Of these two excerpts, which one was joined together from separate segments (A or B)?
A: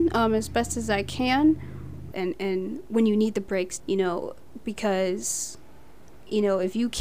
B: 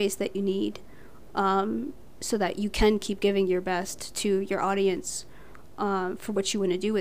A